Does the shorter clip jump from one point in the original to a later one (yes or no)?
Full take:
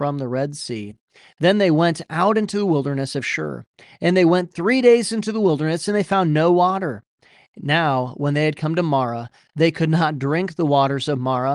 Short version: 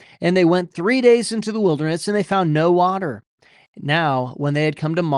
no